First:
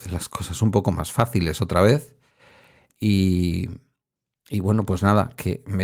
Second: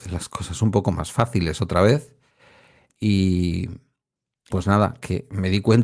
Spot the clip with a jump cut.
second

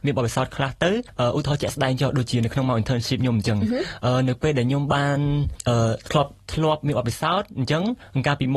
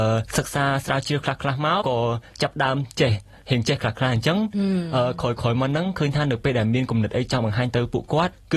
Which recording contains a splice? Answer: second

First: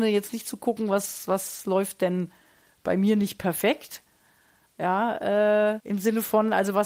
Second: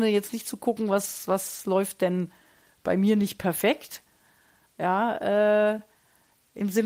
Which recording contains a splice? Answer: first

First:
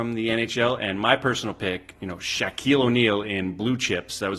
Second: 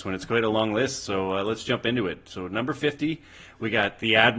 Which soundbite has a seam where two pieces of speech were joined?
first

